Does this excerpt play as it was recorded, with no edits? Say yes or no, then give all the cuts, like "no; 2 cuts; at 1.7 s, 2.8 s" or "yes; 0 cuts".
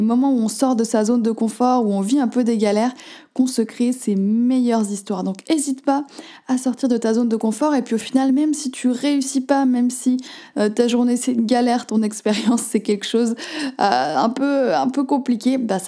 yes; 0 cuts